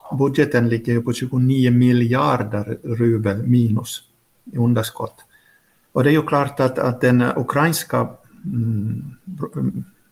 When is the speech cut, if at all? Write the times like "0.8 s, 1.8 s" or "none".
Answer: 5.8 s

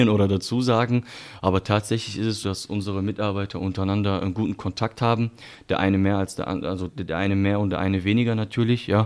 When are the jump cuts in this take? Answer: 2.4 s, 6.9 s

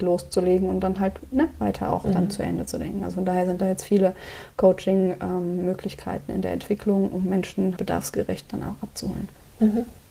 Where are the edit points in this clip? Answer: 7.8 s

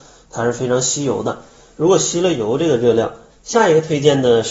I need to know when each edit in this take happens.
3.3 s

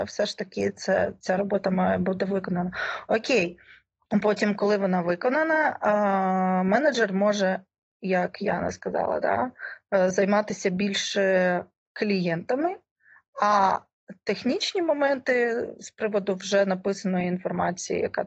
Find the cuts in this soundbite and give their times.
none

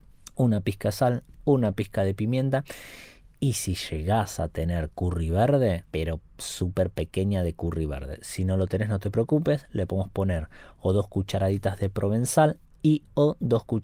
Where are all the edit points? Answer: 5.9 s

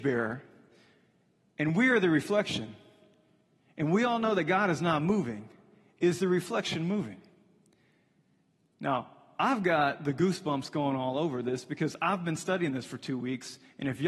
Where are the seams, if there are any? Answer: none

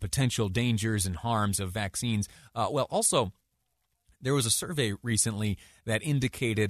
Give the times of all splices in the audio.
none

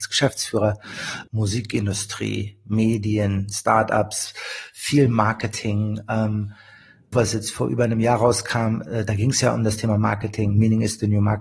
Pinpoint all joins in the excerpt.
1.3 s, 7.1 s

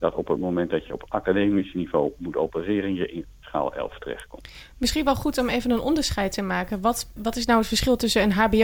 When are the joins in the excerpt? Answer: 7.2 s

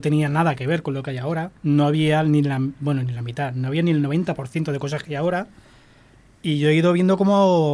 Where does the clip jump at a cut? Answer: 1.5 s

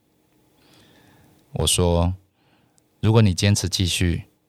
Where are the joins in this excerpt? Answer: 1.4 s

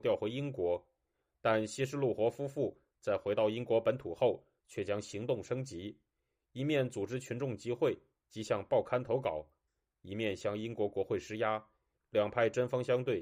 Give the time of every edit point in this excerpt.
12.0 s

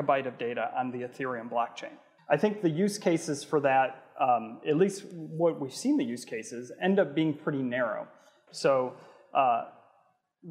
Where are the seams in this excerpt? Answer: 2.2 s, 8.5 s

